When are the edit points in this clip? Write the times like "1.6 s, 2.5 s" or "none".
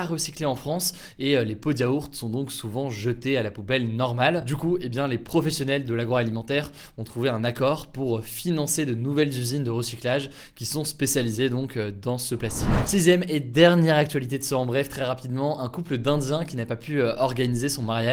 none